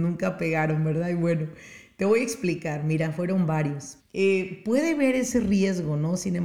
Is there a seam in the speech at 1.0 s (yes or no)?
no